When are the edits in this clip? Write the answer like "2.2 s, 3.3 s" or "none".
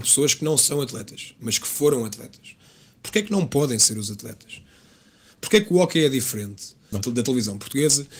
6.9 s